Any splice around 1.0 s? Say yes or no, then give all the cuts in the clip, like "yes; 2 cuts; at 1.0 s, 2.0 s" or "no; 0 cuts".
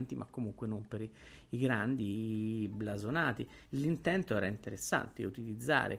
no; 1 cut; at 3.7 s